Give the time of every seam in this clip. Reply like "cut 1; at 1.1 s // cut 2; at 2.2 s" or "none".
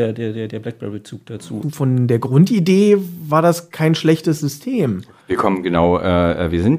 cut 1; at 1.6 s